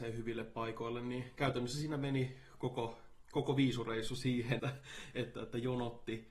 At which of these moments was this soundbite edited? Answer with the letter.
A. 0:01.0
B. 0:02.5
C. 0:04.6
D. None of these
C